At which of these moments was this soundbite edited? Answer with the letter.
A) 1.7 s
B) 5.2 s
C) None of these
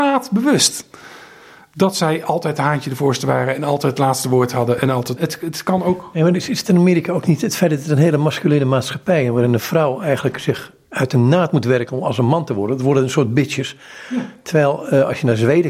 B